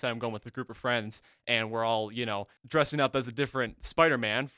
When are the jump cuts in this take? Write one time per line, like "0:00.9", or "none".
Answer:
0:02.6